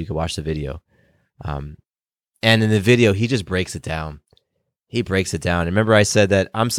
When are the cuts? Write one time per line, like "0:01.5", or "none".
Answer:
none